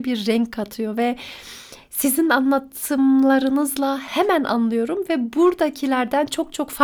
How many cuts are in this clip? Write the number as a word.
zero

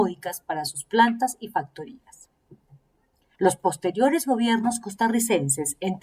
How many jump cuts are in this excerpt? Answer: one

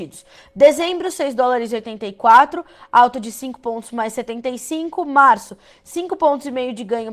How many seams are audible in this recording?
zero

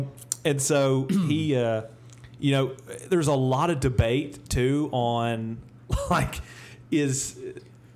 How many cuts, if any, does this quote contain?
zero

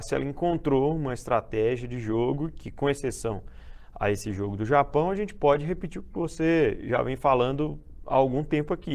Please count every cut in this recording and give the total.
zero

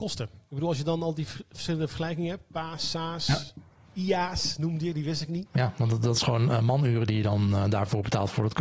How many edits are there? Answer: one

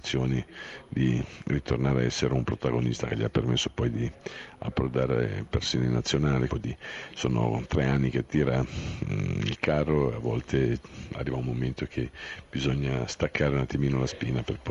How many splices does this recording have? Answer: one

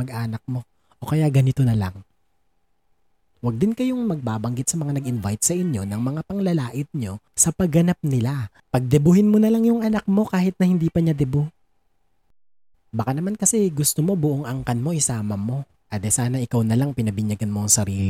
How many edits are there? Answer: three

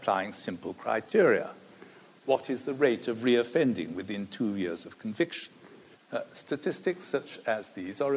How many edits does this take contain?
one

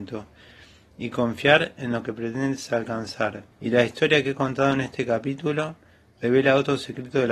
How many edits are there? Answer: one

